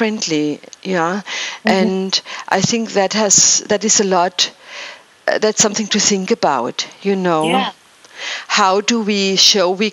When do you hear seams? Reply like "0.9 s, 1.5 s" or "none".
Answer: none